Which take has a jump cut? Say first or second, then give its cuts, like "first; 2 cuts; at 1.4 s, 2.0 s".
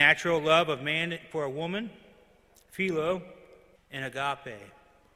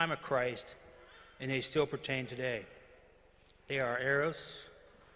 first; 1 cut; at 3.8 s